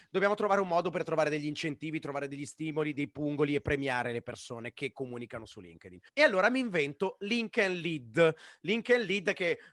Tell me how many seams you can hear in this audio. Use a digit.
1